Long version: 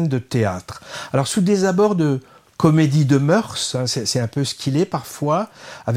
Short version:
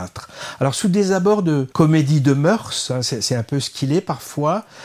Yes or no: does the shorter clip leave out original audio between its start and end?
yes